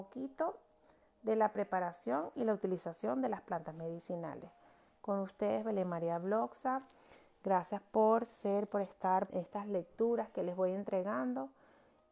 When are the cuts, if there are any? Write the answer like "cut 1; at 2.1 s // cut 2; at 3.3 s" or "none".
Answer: cut 1; at 9.3 s